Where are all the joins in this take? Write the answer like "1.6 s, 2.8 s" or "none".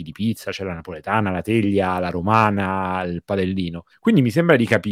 3.9 s